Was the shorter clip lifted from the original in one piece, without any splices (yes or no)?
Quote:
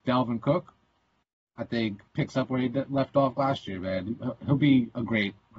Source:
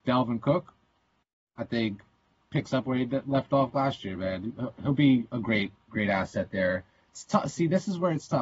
no